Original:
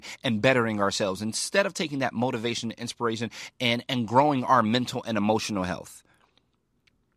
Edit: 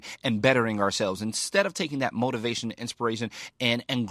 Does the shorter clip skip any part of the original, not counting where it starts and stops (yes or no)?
no